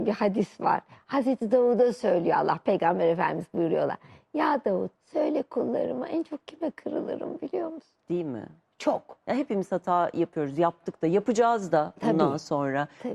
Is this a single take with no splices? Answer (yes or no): no